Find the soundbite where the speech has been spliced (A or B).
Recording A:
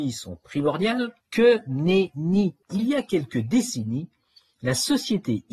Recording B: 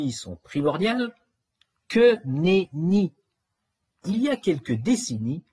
A